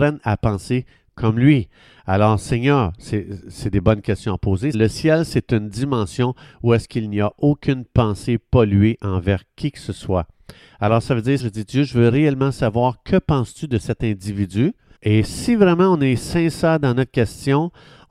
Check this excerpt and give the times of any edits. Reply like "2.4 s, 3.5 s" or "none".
4.7 s, 11.4 s, 15.0 s